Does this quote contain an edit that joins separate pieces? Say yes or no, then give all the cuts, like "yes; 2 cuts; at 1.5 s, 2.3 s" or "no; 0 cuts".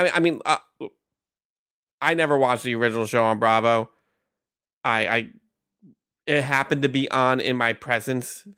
no; 0 cuts